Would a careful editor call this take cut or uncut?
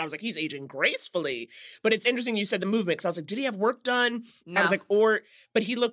uncut